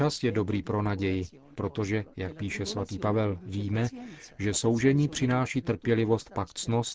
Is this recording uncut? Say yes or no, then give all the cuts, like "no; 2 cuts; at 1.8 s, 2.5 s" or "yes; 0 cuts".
no; 2 cuts; at 1.5 s, 5.6 s